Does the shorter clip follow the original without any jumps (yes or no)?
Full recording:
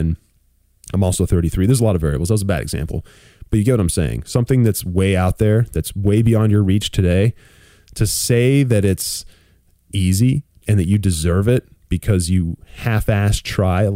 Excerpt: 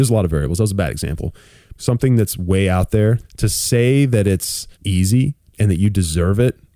no